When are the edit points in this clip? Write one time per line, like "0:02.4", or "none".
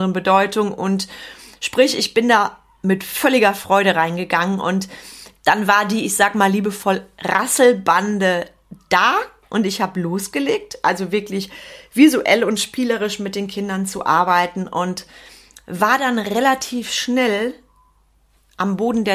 none